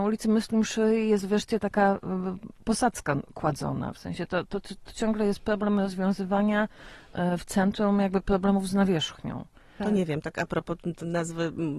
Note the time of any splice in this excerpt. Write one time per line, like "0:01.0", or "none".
0:09.8